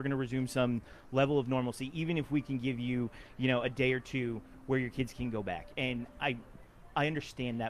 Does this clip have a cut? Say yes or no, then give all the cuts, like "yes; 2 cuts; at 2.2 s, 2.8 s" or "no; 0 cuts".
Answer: no; 0 cuts